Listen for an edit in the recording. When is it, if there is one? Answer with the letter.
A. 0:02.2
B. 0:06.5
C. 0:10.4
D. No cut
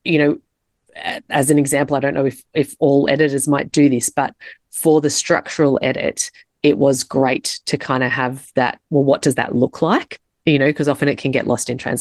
D